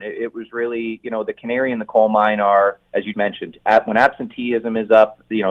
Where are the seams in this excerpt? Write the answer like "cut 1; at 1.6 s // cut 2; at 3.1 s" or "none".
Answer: cut 1; at 3.1 s